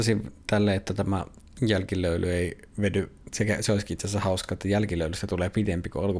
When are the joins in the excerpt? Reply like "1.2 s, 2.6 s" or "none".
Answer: none